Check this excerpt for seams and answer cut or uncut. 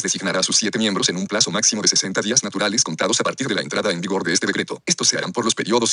cut